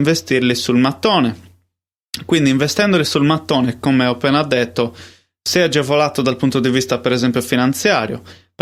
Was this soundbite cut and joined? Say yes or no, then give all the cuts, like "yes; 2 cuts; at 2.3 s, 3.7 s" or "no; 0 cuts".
no; 0 cuts